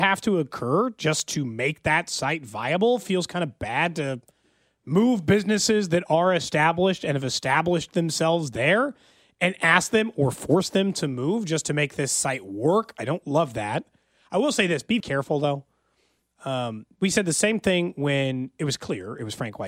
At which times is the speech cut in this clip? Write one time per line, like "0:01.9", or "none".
0:15.0